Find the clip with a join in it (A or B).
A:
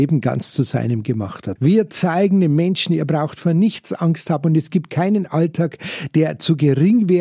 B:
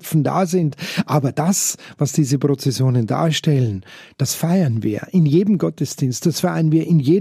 A